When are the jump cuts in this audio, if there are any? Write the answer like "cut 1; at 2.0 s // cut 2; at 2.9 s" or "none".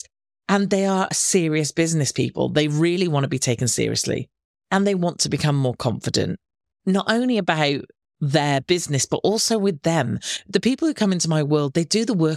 none